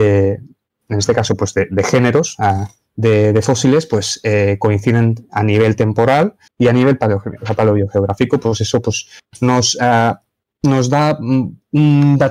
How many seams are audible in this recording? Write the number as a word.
one